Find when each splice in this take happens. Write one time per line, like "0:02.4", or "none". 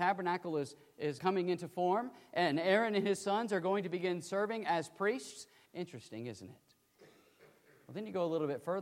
0:01.2
0:05.6